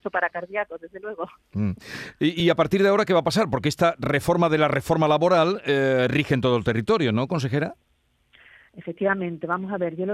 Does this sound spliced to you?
no; 0 cuts

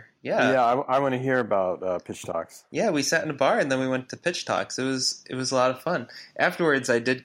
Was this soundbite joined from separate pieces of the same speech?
no; 0 cuts

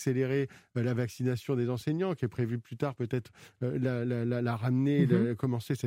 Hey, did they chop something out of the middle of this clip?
no; 0 cuts

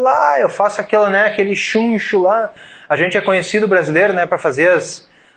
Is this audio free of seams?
yes; 0 cuts

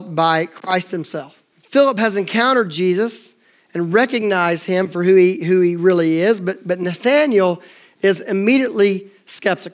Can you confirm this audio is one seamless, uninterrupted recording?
no; 1 cut; at 1.5 s

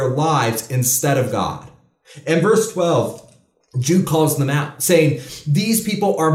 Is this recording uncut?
yes; 0 cuts

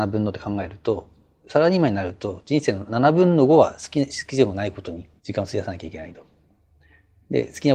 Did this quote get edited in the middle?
yes; 2 cuts; at 2.9 s, 5.2 s

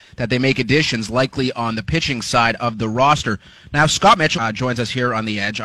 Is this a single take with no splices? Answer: no; 1 cut; at 4.3 s

